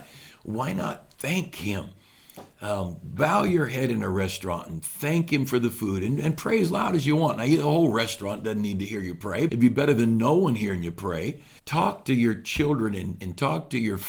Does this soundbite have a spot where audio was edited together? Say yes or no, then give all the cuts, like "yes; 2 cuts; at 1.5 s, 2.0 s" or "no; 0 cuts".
yes; 2 cuts; at 9.5 s, 11.6 s